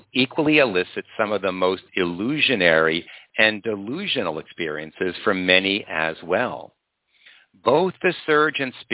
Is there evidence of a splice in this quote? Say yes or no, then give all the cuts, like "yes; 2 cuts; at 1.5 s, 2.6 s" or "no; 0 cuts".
no; 0 cuts